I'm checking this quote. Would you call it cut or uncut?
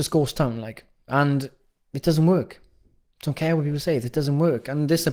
uncut